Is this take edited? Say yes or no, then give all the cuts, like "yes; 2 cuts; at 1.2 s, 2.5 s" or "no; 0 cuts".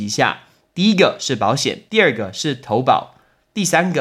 yes; 1 cut; at 1.9 s